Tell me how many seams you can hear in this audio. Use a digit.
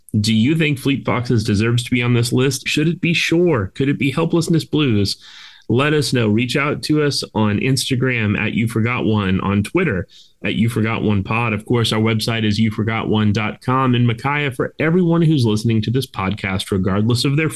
1